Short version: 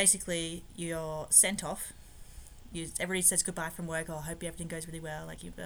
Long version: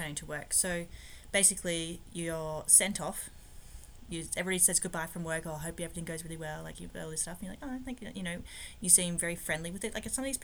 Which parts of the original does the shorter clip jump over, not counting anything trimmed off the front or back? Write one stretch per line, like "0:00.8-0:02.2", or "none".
none